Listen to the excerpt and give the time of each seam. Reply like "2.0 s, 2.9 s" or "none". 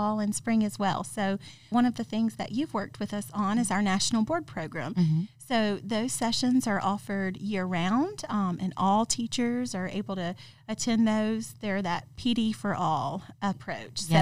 1.7 s

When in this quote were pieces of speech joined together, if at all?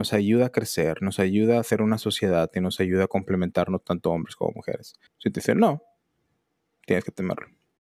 5.1 s

